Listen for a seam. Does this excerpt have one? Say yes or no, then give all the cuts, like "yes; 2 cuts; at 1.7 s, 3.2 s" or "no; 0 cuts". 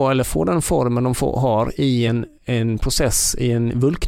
no; 0 cuts